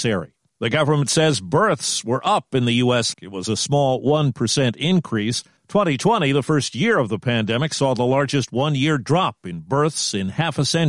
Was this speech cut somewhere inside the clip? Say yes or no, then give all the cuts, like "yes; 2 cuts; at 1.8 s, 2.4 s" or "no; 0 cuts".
yes; 1 cut; at 3.1 s